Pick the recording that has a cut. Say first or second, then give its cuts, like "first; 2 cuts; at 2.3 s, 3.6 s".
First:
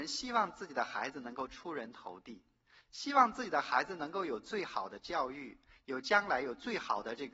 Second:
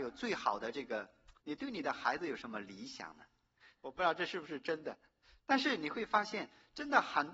second; 2 cuts; at 1.4 s, 3.7 s